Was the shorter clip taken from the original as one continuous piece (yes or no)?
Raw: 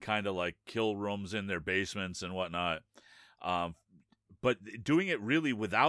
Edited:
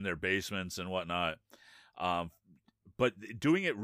yes